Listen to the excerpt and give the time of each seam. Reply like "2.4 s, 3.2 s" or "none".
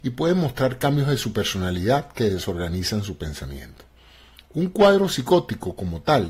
none